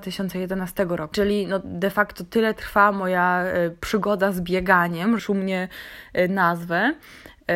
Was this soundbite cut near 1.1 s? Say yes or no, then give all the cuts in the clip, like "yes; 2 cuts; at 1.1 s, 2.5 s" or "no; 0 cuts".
yes; 2 cuts; at 1.1 s, 5.2 s